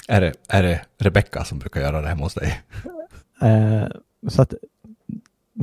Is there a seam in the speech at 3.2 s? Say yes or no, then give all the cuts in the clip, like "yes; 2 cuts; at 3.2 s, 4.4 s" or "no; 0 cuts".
yes; 1 cut; at 3.2 s